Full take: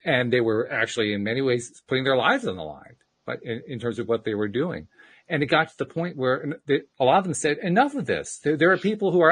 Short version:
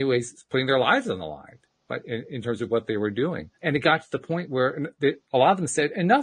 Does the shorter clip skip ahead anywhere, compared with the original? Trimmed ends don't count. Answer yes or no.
yes